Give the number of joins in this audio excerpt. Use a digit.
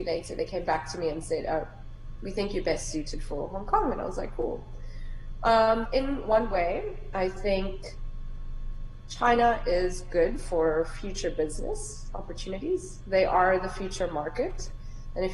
1